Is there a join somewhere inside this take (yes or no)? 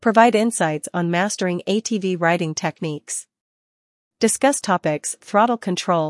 yes